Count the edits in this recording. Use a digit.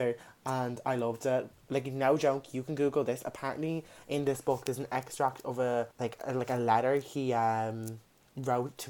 2